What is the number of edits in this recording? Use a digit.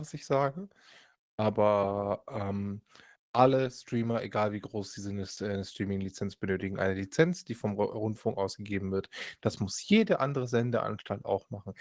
0